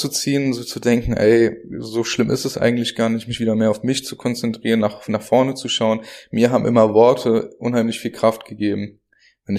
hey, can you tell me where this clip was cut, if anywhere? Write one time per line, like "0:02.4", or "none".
none